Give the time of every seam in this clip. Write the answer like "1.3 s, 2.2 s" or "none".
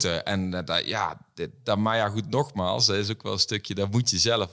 none